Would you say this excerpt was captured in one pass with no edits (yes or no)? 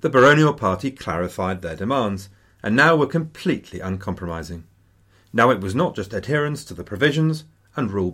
yes